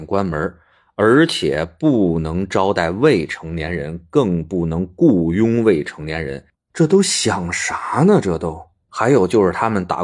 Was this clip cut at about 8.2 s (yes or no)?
no